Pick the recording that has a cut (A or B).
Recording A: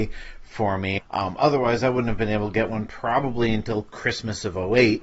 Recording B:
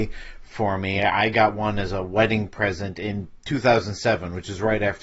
A